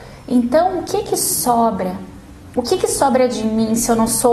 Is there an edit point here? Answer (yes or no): no